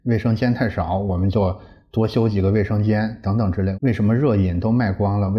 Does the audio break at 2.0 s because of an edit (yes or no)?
no